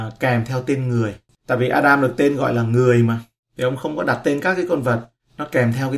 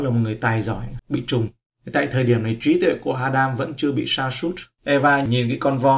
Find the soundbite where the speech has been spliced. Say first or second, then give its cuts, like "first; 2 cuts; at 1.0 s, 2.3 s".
second; 2 cuts; at 1.0 s, 4.8 s